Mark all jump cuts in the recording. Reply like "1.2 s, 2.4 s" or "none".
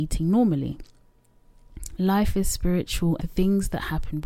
2.0 s, 3.2 s